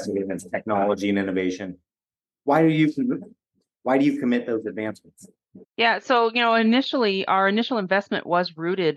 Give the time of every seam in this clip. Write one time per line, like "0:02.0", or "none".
0:05.7